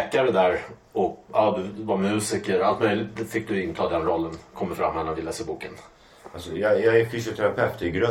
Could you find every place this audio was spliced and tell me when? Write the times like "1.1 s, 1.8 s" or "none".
1.3 s